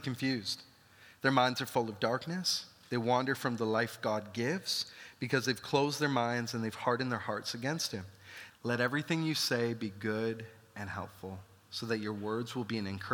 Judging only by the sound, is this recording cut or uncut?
cut